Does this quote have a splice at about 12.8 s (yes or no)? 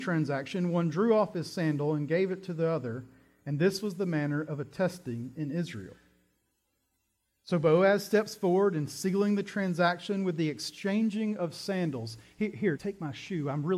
yes